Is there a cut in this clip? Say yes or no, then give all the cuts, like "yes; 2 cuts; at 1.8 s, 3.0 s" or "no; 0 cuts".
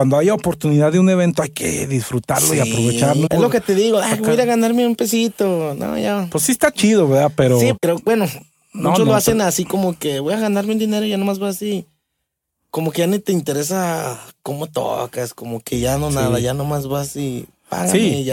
yes; 2 cuts; at 3.3 s, 7.8 s